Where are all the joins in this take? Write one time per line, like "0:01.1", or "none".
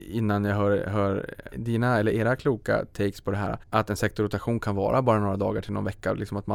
0:01.5
0:03.6